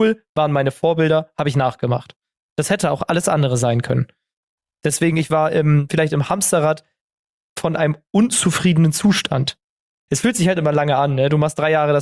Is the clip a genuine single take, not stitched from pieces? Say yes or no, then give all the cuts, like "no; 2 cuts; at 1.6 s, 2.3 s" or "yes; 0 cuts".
no; 1 cut; at 10.1 s